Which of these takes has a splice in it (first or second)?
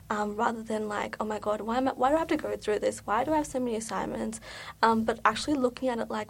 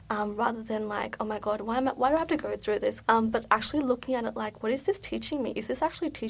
second